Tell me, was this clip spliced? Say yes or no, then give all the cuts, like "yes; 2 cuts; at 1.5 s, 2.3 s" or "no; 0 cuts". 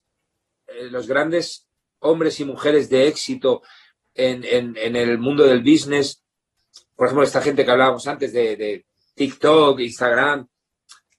no; 0 cuts